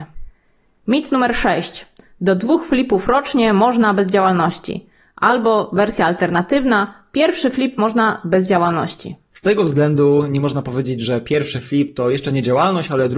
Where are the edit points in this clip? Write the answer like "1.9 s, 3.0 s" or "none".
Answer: 9.3 s